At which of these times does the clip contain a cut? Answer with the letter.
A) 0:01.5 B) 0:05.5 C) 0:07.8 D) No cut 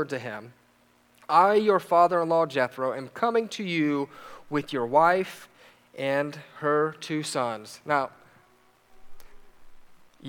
D